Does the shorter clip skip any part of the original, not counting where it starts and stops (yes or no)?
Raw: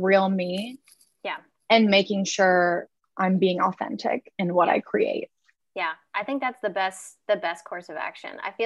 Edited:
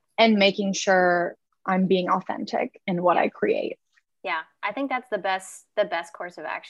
no